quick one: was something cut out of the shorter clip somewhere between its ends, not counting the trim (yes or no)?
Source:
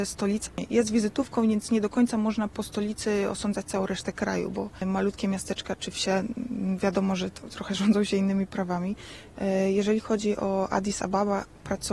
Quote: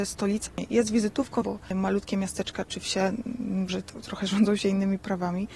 yes